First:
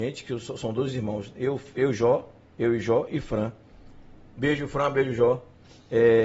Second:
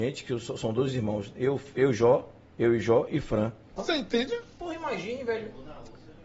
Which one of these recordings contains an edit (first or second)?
second